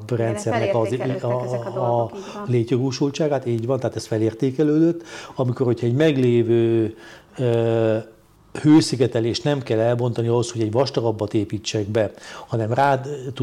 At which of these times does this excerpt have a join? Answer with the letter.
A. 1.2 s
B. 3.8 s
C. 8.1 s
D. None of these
D